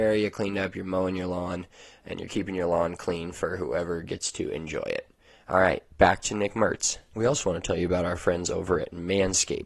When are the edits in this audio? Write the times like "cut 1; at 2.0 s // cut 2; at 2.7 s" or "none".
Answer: cut 1; at 7.1 s